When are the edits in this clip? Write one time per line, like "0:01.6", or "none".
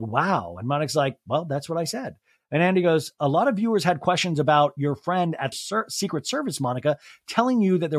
0:05.5